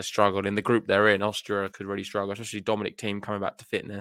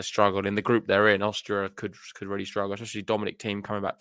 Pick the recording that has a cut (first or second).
first